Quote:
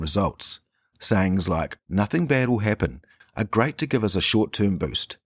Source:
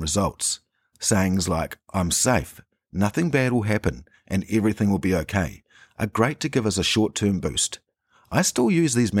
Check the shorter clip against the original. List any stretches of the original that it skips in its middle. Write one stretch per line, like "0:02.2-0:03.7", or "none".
0:01.8-0:02.8
0:04.2-0:05.8

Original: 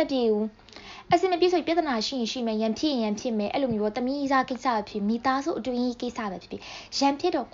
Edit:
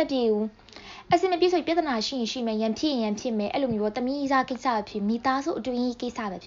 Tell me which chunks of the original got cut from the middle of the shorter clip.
none

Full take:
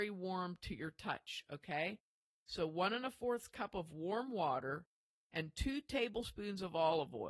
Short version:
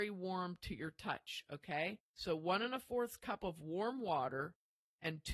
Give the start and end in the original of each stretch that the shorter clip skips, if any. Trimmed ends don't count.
0:02.0-0:02.4

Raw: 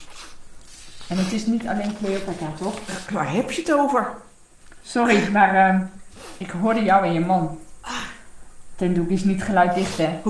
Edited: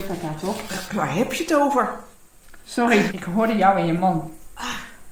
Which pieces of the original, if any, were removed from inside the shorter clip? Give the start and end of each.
0:05.3-0:06.4

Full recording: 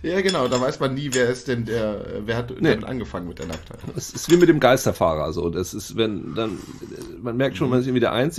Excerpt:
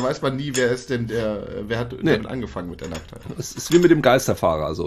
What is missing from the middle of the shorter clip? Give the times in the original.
none

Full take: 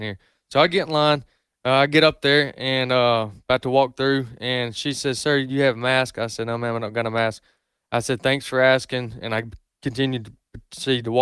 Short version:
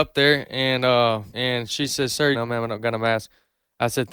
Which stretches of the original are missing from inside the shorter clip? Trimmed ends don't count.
0:03.4-0:04.4
0:05.4-0:06.4

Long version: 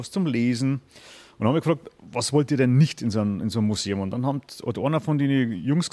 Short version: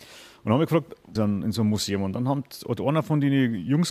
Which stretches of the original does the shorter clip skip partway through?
0:02.1-0:03.1

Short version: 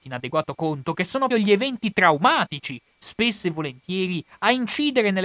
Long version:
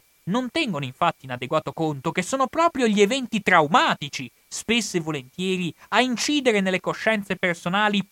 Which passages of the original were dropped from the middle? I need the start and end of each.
0:02.5-0:02.8

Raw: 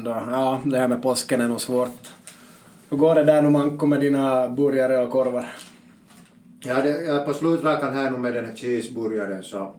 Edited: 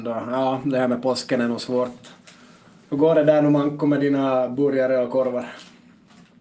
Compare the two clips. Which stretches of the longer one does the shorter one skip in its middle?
none

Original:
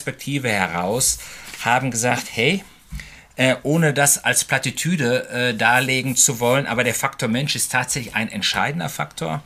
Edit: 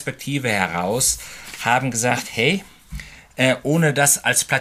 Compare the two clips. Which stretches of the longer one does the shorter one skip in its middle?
none

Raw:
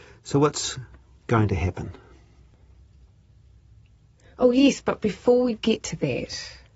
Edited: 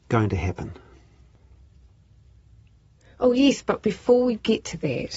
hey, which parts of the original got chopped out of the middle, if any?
none

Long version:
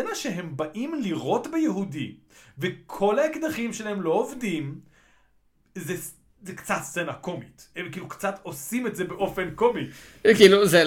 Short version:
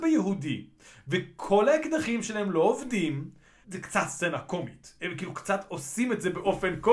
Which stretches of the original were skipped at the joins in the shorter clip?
0:05.1-0:06.4

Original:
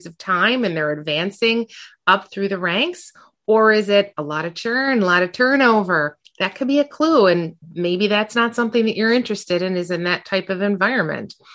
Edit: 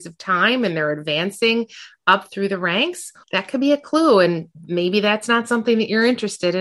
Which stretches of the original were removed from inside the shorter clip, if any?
0:03.2-0:06.3

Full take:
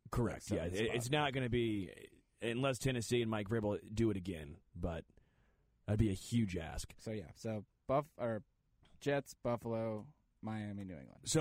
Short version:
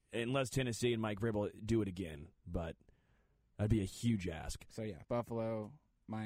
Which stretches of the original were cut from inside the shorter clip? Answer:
0:07.3-0:09.4

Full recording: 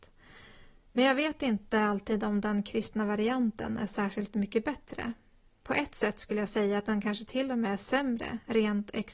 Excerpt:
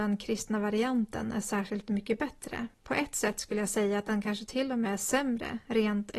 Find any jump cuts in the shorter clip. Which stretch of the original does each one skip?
0:05.2-0:05.5

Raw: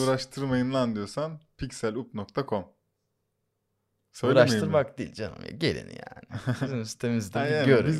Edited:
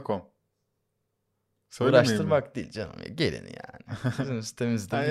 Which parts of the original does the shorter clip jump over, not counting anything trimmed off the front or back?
none

